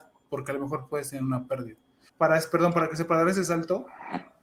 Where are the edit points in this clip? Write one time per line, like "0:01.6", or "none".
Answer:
0:02.1